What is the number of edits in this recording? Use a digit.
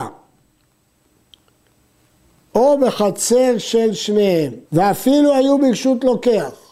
1